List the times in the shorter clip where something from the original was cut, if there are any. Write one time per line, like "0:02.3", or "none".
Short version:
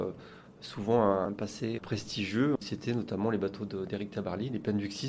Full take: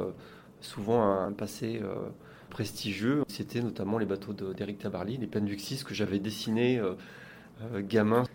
0:01.8